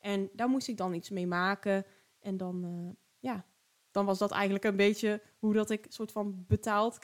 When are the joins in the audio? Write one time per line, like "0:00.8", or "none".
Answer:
none